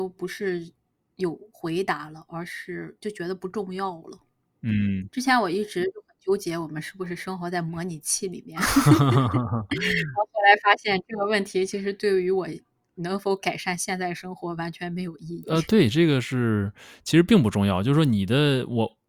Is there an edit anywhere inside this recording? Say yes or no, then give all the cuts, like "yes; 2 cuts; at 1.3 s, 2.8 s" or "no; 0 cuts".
no; 0 cuts